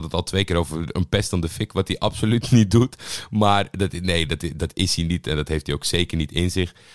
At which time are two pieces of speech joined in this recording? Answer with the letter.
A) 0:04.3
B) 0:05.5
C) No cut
C